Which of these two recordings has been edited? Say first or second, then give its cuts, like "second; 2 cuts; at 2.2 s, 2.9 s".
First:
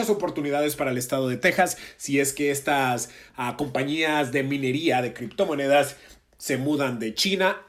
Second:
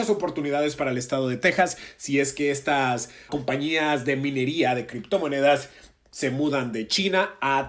second; 1 cut; at 3.3 s